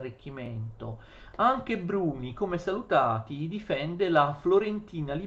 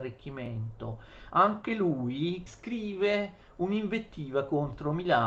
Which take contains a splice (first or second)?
second